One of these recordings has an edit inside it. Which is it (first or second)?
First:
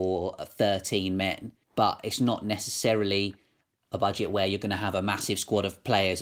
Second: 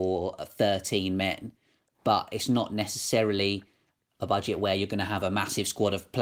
first